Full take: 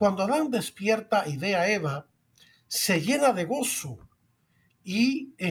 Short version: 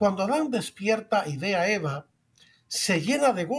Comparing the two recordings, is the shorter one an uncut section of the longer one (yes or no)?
yes